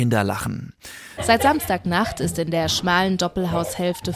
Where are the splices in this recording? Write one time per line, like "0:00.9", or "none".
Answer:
0:01.2